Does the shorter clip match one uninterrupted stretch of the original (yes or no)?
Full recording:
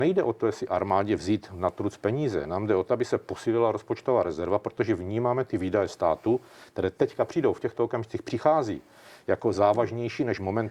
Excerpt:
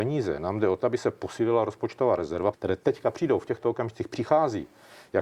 no